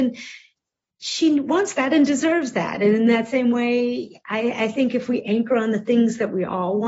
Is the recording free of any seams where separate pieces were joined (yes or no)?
yes